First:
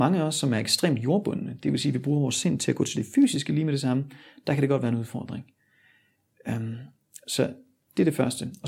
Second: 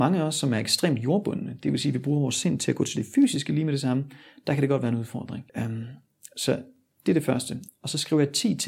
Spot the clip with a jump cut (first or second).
second